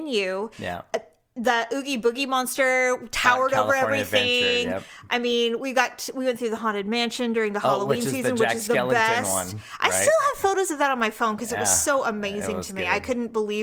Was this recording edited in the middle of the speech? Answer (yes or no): no